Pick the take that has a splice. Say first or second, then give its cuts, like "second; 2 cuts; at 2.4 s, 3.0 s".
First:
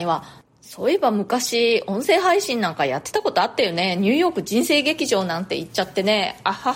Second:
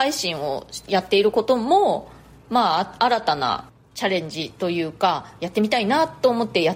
second; 1 cut; at 5.4 s